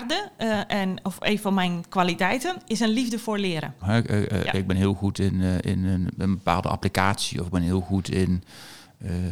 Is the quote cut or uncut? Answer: cut